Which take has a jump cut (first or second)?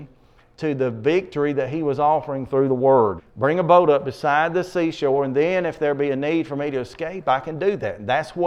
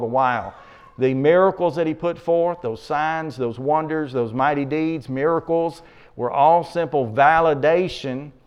first